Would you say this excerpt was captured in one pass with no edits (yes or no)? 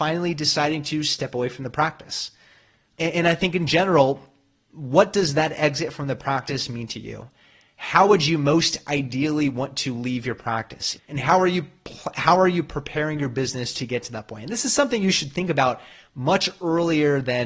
no